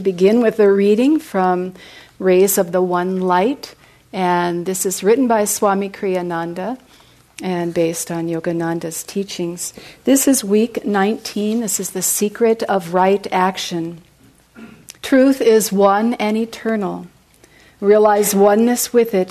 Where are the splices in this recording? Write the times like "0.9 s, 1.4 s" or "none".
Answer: 15.0 s